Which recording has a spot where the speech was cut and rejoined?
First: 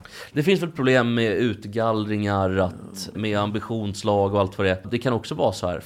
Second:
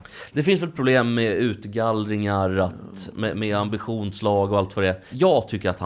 first; 2 cuts; at 3.1 s, 4.8 s

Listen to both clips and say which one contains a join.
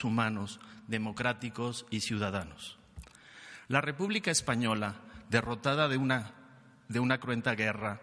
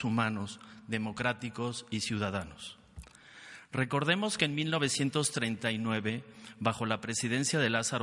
first; 1 cut; at 3.7 s

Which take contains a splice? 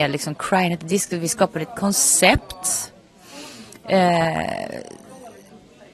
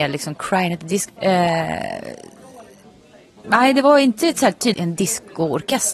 second; 3 cuts; at 1.1 s, 3.4 s, 4.7 s

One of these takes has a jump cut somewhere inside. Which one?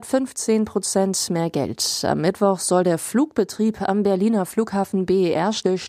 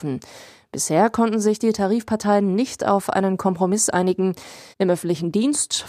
second; 1 cut; at 4.7 s

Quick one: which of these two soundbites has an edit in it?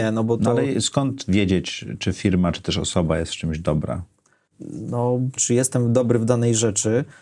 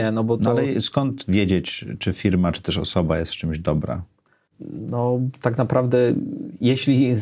first; 1 cut; at 5.4 s

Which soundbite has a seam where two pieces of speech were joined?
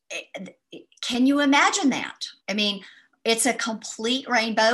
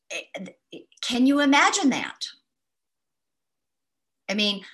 first; 1 cut; at 2.4 s

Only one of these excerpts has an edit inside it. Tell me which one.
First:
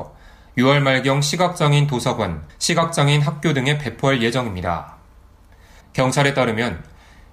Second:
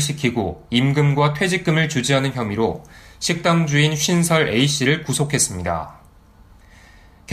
first; 2 cuts; at 2.5 s, 5.8 s

